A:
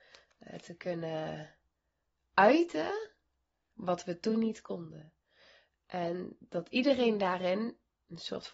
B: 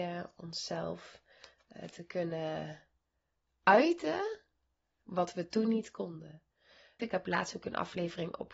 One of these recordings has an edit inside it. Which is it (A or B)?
B